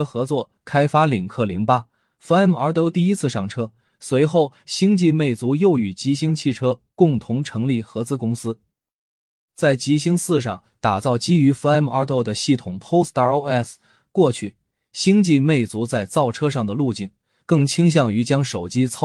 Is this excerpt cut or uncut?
uncut